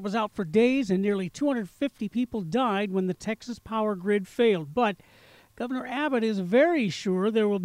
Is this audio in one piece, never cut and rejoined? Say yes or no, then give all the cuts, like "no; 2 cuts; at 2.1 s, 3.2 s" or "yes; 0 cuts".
yes; 0 cuts